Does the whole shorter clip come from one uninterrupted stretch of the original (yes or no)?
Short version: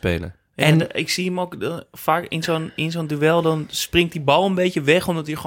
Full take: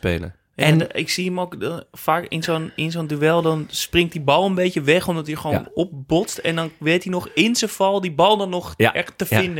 yes